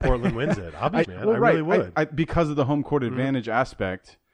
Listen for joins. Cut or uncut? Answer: cut